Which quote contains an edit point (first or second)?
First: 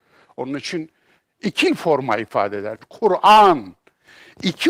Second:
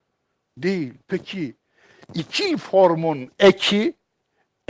first